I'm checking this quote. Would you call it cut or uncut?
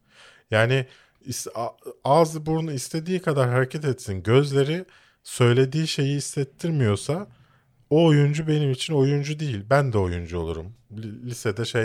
cut